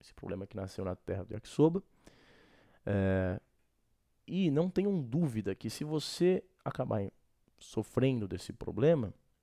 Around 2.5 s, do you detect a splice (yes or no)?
no